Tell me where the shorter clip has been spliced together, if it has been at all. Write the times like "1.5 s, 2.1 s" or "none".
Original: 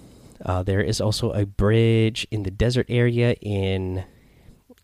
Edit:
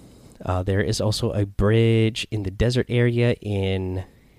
none